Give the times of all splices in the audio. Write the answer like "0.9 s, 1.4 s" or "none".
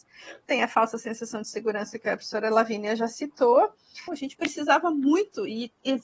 4.1 s

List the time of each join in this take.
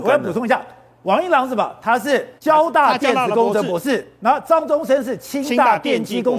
2.4 s

